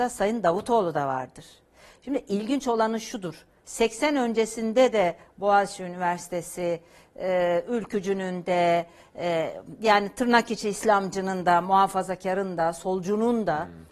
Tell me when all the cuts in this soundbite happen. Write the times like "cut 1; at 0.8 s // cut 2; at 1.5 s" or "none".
none